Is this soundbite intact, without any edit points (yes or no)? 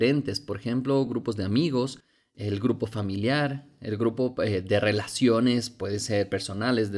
yes